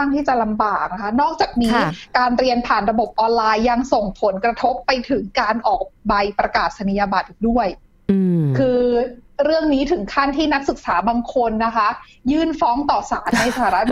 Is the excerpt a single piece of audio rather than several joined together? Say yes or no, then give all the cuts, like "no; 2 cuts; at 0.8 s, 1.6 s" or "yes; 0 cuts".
yes; 0 cuts